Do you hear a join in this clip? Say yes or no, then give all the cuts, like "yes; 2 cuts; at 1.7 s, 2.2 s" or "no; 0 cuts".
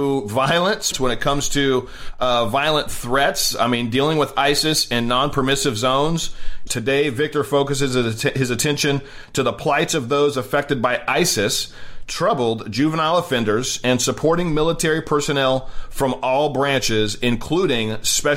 yes; 2 cuts; at 0.9 s, 6.7 s